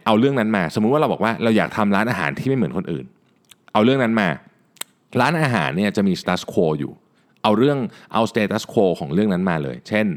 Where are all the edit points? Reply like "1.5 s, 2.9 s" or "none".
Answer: 6.2 s